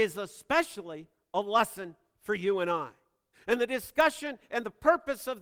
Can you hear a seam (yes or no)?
yes